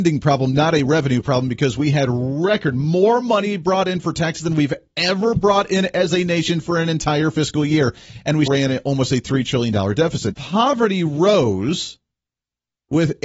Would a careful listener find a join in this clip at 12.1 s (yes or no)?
no